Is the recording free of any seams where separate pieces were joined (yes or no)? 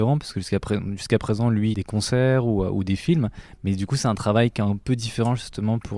no